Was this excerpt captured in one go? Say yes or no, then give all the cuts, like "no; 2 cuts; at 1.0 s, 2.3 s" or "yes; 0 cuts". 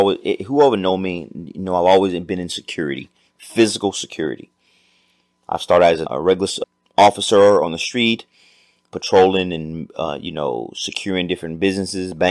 yes; 0 cuts